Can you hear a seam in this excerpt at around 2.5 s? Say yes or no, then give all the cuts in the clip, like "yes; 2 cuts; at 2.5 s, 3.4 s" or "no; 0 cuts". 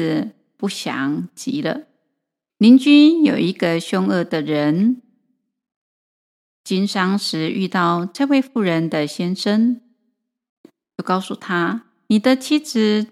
yes; 1 cut; at 2.5 s